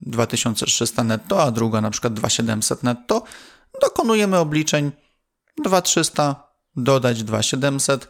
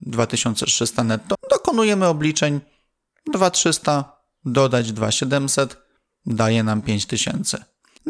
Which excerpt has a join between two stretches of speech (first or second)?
second